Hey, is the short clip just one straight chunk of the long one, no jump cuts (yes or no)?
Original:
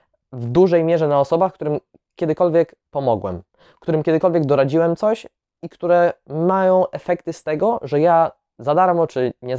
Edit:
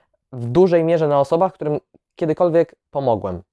yes